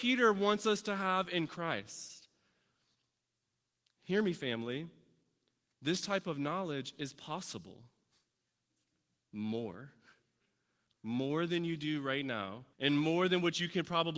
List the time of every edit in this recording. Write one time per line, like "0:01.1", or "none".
0:09.2
0:12.7